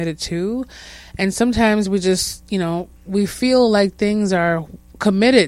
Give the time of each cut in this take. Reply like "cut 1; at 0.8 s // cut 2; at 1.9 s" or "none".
none